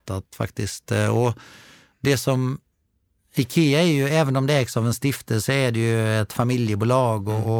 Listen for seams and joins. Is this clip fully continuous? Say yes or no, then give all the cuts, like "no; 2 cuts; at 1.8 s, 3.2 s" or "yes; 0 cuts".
yes; 0 cuts